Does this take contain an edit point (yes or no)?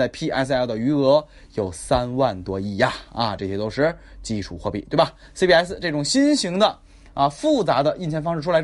no